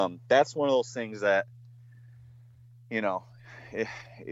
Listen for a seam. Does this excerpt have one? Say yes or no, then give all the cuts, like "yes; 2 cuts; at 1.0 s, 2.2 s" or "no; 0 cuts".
no; 0 cuts